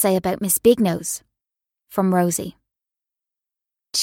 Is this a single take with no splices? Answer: yes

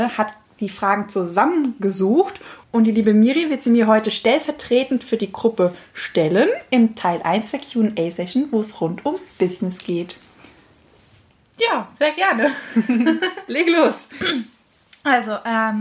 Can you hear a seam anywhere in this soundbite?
no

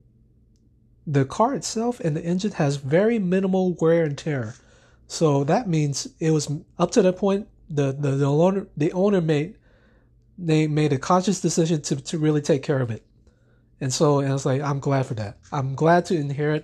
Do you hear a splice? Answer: yes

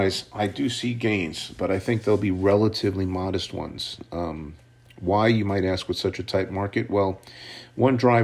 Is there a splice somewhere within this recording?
no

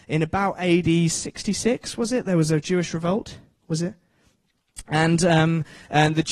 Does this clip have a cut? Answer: no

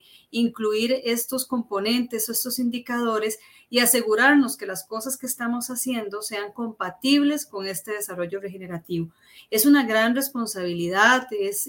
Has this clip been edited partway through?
no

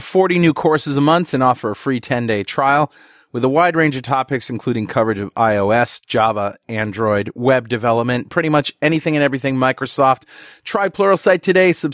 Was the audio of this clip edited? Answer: no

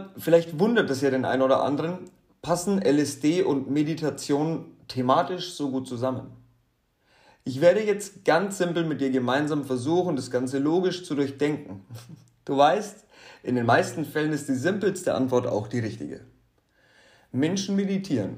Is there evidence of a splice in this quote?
no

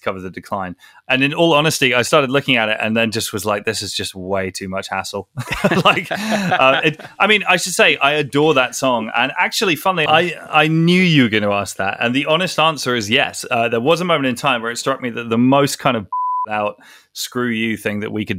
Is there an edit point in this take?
yes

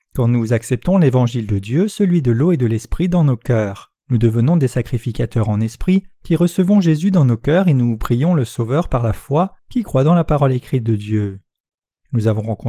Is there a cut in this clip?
yes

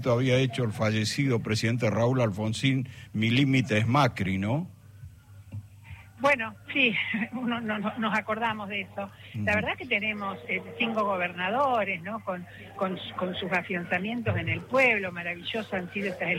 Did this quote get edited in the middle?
no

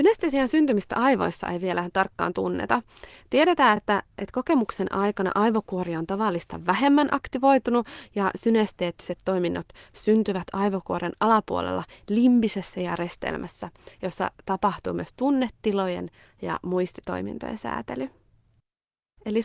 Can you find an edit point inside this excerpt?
no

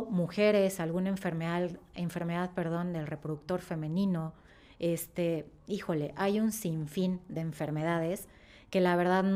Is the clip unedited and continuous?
yes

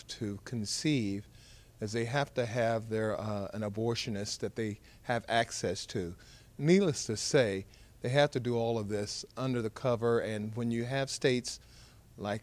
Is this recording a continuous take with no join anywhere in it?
yes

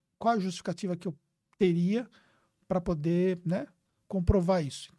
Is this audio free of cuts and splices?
yes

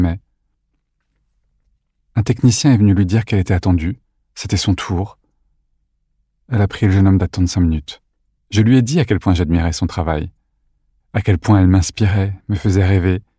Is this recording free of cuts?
no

